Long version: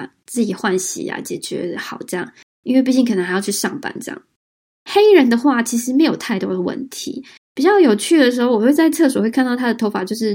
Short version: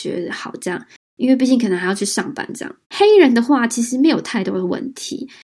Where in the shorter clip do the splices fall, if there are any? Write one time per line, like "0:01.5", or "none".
0:02.8